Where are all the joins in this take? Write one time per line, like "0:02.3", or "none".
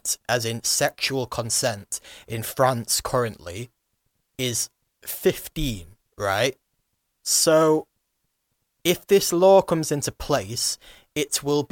none